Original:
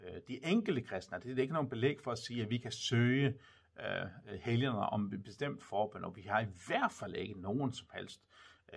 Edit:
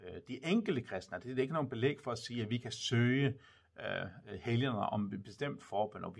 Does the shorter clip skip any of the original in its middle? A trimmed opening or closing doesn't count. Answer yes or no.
no